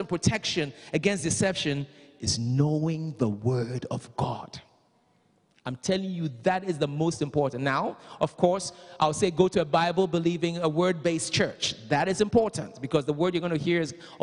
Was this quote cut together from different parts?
no; 0 cuts

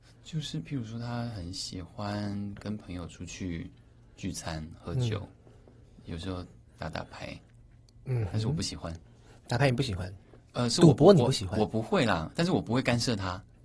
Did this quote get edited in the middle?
no; 0 cuts

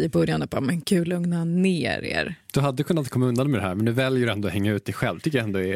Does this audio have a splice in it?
no; 0 cuts

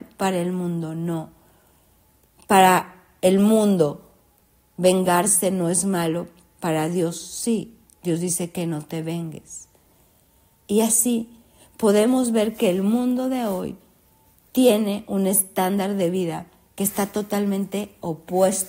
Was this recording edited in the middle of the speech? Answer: no; 0 cuts

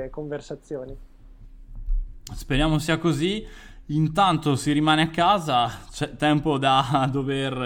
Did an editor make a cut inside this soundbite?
no; 0 cuts

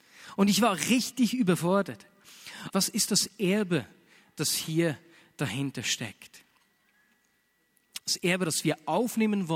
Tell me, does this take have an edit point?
yes; 1 cut; at 2.7 s

